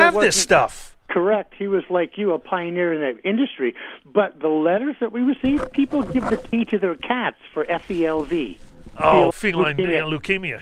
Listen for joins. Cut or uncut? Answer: cut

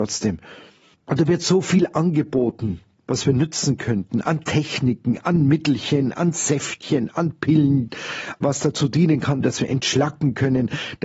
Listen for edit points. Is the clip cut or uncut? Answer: cut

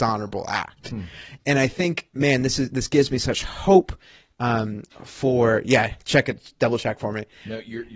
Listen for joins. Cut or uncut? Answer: uncut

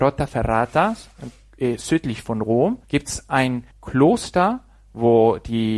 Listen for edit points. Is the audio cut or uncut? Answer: cut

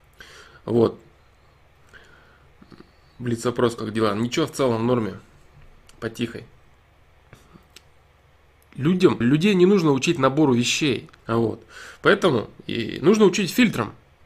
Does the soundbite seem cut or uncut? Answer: cut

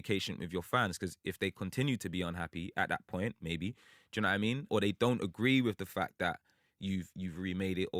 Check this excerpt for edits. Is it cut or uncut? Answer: uncut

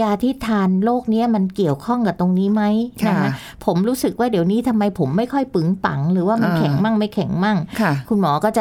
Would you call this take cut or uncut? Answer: uncut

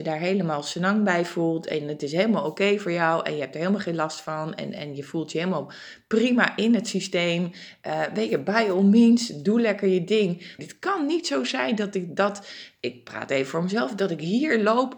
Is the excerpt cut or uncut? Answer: cut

